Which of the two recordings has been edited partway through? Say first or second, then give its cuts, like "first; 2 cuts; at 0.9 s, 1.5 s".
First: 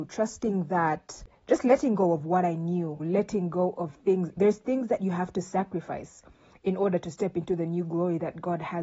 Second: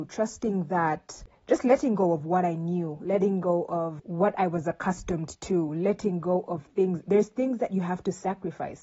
first; 1 cut; at 3.0 s